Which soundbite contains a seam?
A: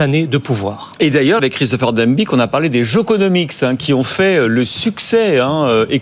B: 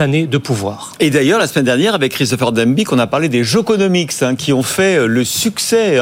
A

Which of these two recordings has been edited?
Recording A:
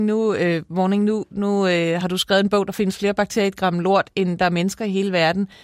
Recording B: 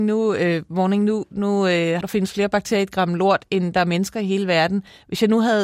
B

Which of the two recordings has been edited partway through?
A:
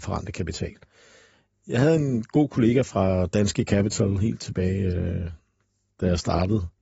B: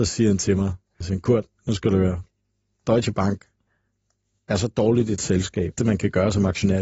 B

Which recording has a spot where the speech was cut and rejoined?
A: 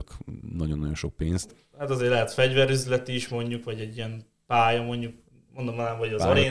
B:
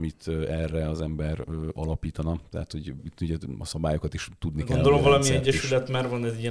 A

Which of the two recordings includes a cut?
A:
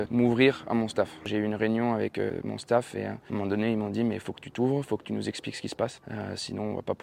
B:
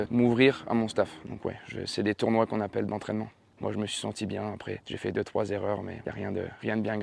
B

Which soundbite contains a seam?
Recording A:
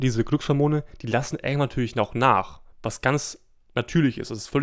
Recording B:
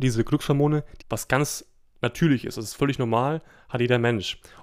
B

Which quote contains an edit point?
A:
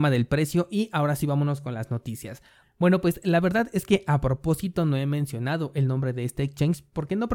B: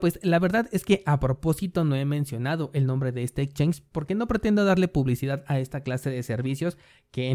A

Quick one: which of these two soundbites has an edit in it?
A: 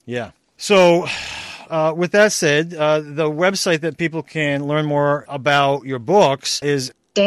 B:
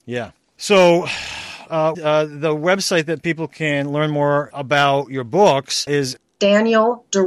B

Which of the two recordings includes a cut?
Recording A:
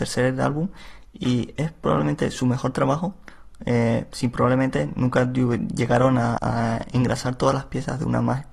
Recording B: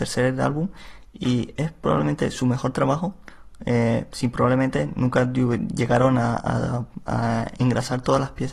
A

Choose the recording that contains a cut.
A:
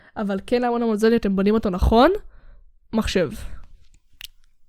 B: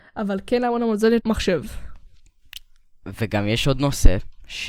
B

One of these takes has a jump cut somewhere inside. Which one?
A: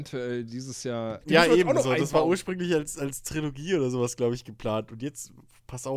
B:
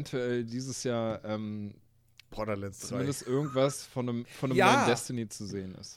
A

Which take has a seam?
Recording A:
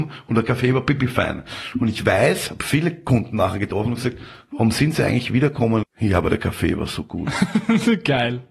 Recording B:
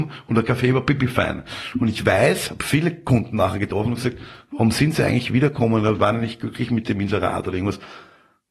A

